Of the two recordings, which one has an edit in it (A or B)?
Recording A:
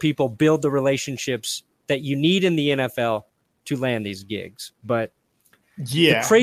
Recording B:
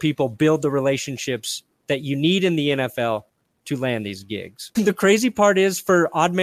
B